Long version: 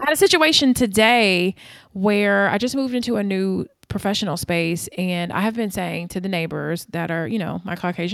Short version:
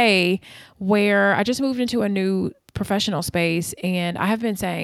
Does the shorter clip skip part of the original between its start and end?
no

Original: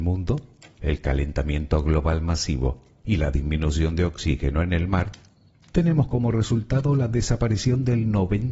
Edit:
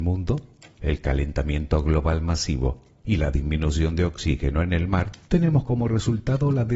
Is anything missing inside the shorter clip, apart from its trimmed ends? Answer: yes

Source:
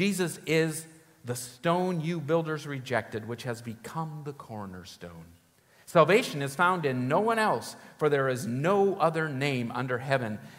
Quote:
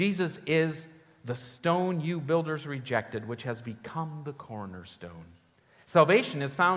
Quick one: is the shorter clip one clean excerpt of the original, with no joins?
yes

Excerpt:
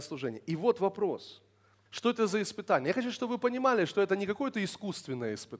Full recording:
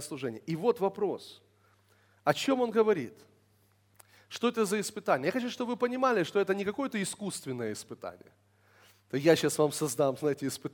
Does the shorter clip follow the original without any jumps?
no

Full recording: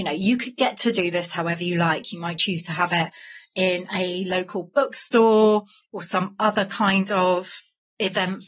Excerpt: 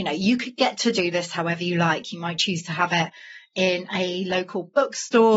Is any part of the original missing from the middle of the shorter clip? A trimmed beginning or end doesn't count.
no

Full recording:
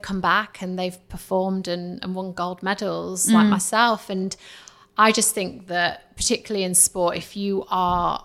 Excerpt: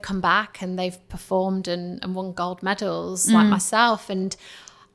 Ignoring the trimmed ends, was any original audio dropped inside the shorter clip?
no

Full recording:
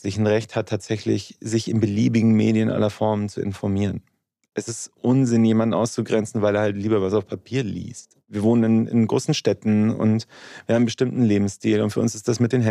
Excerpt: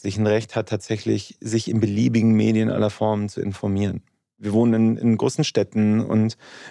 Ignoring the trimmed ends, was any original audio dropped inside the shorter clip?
yes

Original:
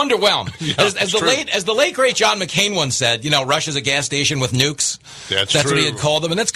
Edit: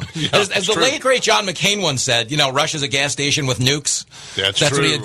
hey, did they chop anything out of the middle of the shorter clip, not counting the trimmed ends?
yes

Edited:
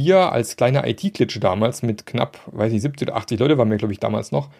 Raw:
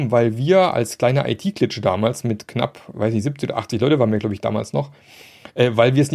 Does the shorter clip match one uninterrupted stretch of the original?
yes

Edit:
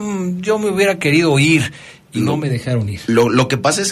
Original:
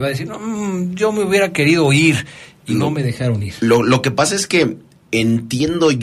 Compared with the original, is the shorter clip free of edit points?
yes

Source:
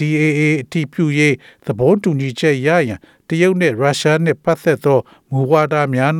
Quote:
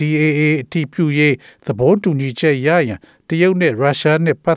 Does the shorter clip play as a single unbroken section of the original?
yes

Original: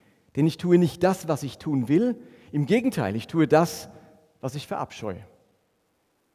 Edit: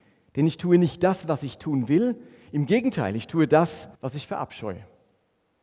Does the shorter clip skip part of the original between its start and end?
yes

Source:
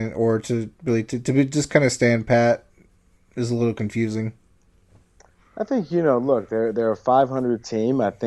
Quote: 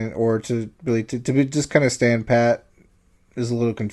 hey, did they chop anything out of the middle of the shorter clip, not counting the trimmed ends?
no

